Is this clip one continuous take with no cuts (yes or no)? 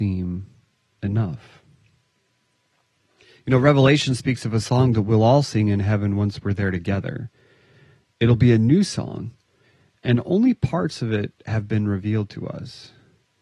yes